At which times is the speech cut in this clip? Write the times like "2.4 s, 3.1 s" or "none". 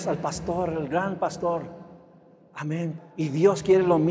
3.0 s